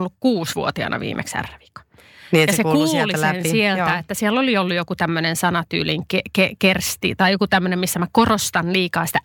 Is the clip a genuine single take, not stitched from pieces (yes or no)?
yes